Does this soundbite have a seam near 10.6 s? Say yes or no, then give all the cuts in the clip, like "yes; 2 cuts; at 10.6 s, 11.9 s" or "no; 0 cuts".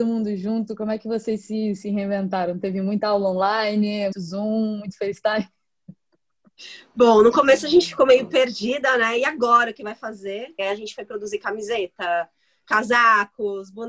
yes; 3 cuts; at 4.1 s, 10.6 s, 12.6 s